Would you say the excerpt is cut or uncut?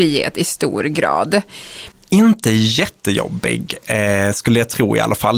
cut